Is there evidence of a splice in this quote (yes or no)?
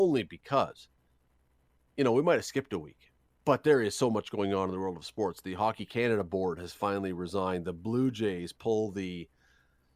no